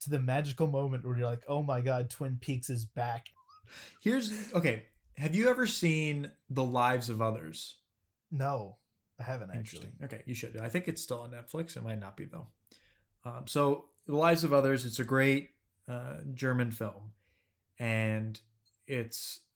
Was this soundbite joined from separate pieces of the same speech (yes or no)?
yes